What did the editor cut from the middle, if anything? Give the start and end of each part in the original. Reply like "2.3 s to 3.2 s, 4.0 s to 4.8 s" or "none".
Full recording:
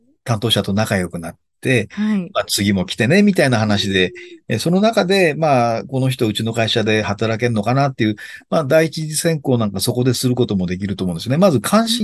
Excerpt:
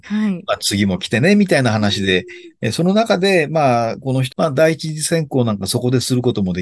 6.2 s to 8.4 s